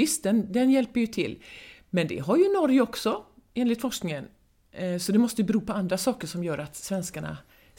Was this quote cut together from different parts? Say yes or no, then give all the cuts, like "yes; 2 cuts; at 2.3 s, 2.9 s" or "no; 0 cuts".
no; 0 cuts